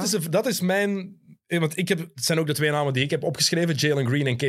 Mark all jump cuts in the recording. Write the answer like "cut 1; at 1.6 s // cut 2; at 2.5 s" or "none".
none